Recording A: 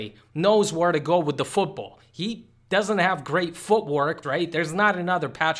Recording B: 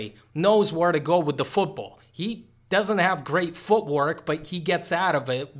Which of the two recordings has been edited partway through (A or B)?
A